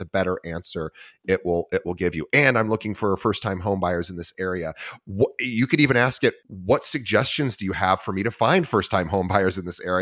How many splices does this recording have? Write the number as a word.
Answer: one